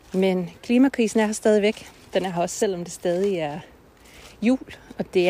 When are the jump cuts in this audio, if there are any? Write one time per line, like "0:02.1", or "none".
none